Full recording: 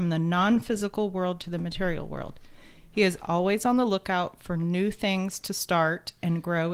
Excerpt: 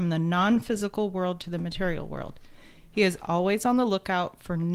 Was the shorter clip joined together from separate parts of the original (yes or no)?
no